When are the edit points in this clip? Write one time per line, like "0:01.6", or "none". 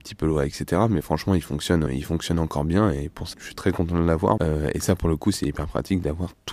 0:01.9
0:03.3
0:04.4

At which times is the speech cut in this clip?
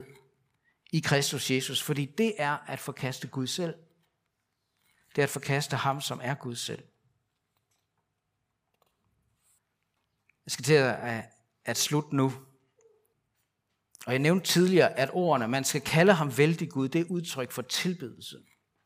none

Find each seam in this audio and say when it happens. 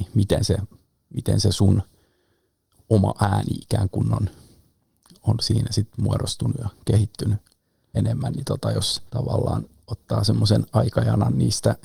0:07.9
0:09.1

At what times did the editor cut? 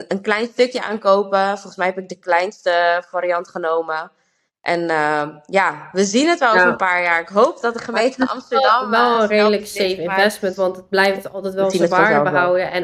none

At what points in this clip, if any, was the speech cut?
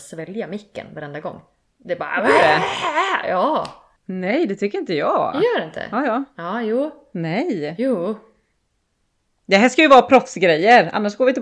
none

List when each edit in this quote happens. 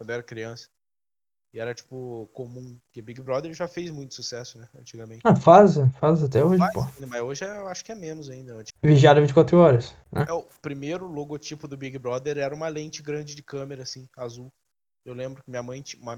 0:08.7

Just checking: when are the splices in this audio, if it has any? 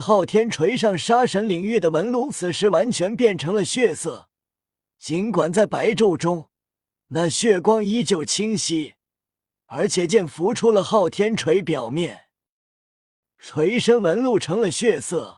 0:10.1
0:13.2

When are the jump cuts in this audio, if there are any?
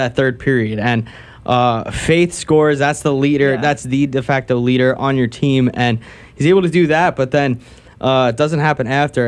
none

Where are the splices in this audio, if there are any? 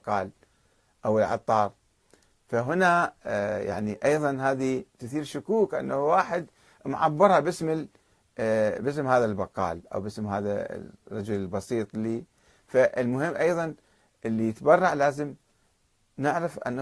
none

